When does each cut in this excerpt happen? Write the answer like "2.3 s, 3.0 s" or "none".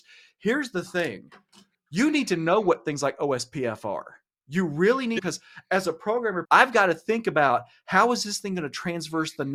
5.2 s, 6.4 s